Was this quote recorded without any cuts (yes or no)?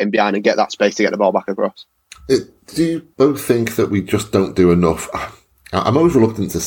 no